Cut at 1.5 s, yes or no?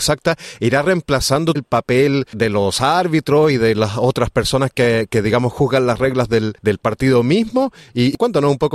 yes